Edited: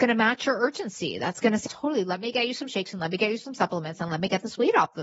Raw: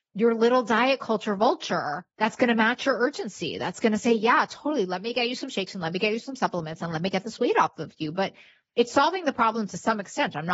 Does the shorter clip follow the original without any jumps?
no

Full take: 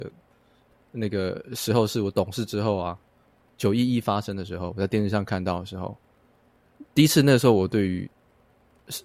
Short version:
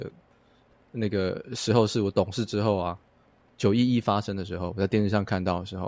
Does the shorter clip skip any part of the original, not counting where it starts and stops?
no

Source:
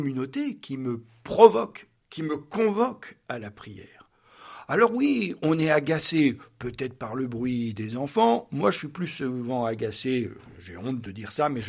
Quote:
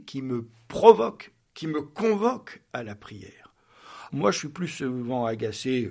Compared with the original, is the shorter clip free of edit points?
no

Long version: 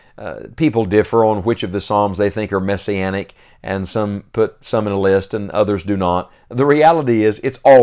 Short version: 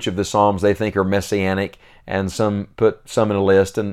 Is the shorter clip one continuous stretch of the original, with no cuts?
yes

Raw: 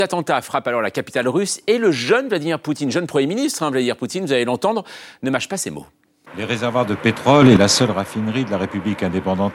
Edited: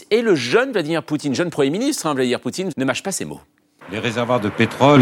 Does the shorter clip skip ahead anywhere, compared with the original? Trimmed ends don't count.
yes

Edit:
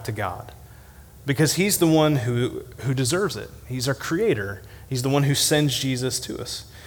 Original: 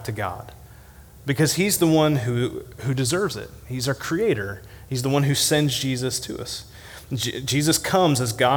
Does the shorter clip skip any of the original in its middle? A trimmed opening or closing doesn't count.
no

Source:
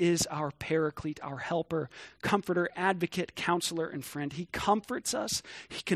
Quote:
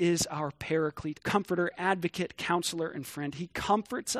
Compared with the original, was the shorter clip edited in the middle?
yes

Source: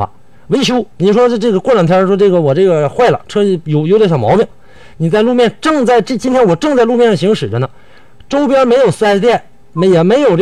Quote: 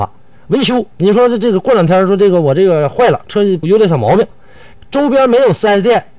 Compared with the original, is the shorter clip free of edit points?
no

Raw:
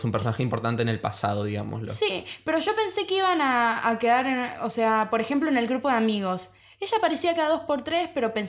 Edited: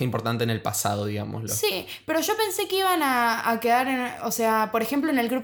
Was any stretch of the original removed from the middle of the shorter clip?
no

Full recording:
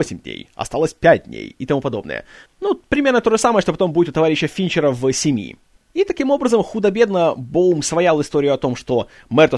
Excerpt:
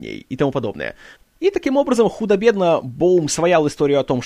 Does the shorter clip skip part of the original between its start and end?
yes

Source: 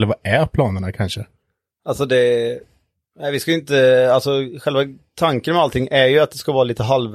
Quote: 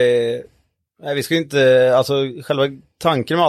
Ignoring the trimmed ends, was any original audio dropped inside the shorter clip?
no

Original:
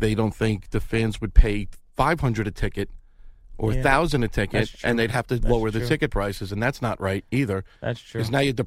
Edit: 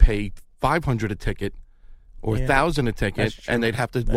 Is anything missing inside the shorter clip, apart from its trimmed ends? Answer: no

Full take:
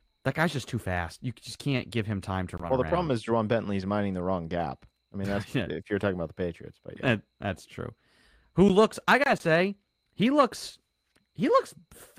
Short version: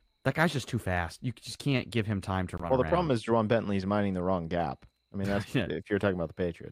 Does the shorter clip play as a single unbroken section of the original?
yes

